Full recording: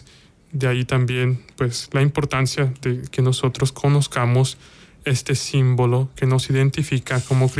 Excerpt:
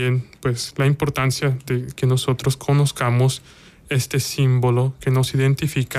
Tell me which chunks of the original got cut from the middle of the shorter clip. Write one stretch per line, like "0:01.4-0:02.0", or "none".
none